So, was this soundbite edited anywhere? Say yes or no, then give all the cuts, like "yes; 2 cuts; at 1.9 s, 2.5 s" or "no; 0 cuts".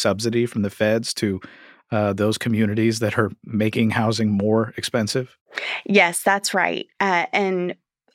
no; 0 cuts